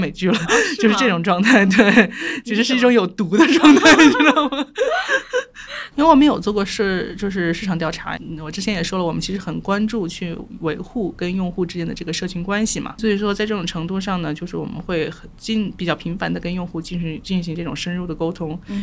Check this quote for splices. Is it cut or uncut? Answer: cut